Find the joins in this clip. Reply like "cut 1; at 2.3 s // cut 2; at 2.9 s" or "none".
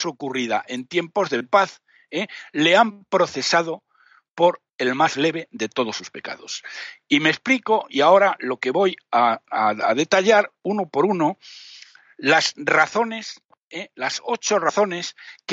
none